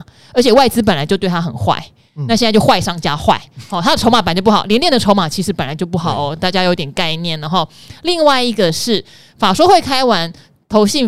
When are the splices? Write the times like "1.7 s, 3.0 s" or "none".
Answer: none